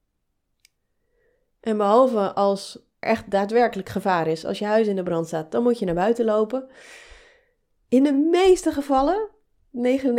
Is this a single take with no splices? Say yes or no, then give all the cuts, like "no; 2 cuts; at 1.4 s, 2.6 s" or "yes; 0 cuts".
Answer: no; 1 cut; at 3.0 s